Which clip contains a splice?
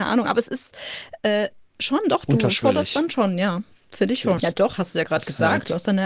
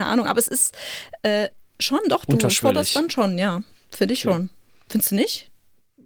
first; 1 cut; at 4.4 s

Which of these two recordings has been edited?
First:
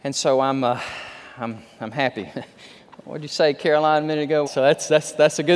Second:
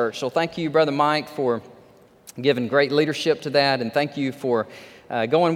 first; 2 cuts; at 2.3 s, 4.4 s

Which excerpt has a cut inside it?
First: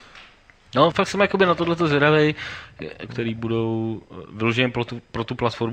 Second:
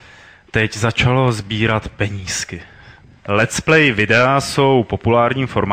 first; 2 cuts; at 0.9 s, 3.1 s

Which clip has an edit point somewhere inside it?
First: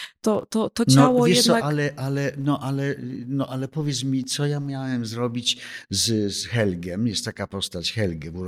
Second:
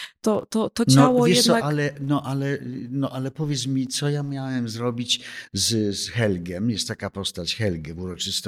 second; 1 cut; at 1.9 s

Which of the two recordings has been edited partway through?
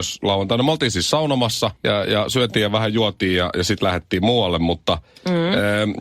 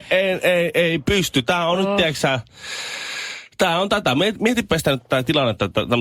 first; 1 cut; at 1.8 s

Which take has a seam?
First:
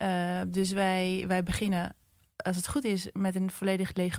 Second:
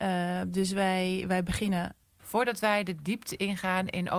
second; 1 cut; at 2.2 s

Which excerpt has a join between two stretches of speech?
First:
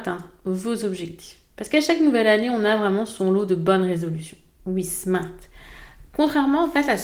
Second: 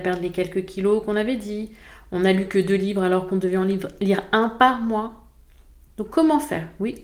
first; 1 cut; at 4.6 s

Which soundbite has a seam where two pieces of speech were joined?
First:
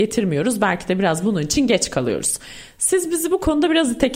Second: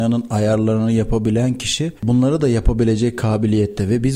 second; 1 cut; at 2.0 s

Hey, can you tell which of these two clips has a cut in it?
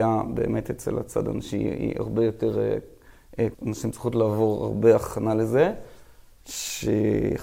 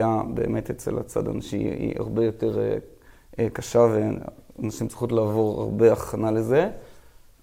first; 2 cuts; at 3.5 s, 6.4 s

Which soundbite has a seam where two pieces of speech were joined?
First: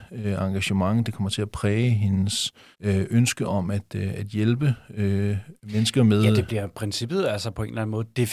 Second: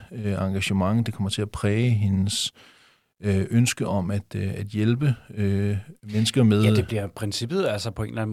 first; 1 cut; at 2.7 s

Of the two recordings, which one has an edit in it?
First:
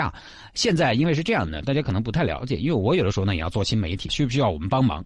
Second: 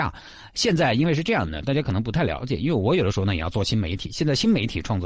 first; 1 cut; at 4.1 s

